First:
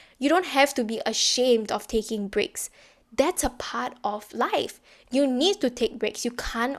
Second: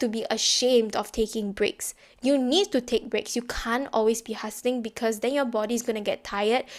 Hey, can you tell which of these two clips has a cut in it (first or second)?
second